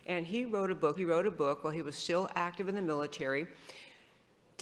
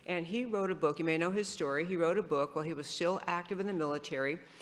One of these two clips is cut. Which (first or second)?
first